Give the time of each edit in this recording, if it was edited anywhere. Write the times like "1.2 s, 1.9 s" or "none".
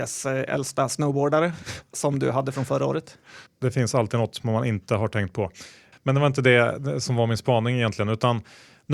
3.5 s, 5.9 s